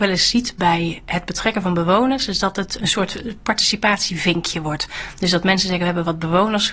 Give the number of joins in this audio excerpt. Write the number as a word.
one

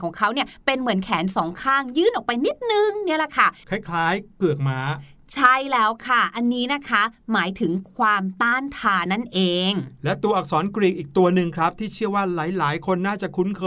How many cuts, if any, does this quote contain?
one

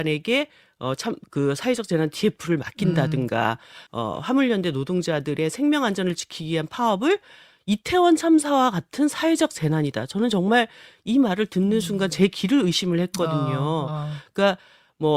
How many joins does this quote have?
one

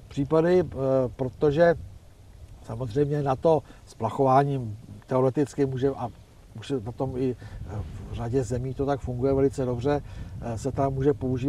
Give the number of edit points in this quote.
zero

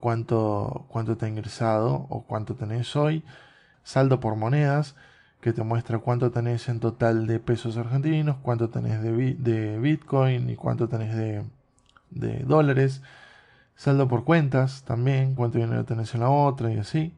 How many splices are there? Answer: two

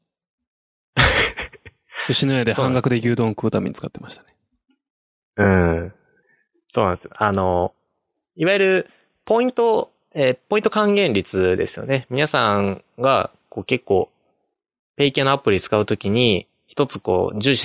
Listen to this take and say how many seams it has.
zero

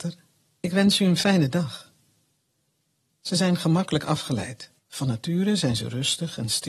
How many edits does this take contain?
one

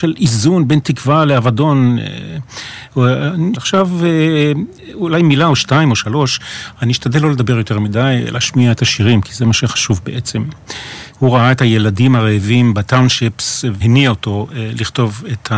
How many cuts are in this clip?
three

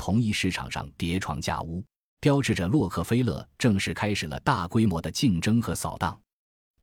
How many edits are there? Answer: one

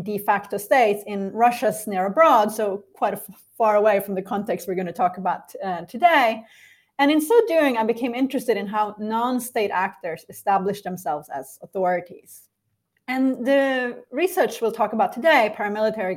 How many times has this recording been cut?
zero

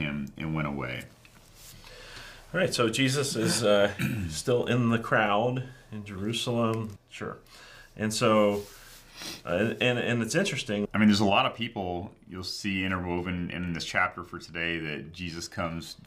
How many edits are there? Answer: two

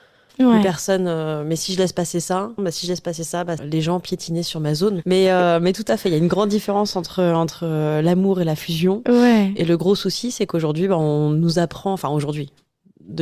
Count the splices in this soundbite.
three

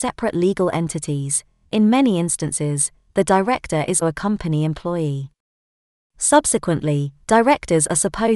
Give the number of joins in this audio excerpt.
one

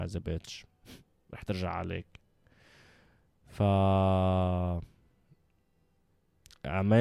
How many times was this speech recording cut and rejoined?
zero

